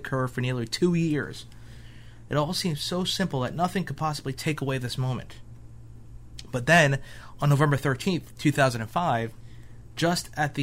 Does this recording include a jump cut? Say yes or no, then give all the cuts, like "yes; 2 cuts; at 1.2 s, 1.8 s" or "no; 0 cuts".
yes; 1 cut; at 2.3 s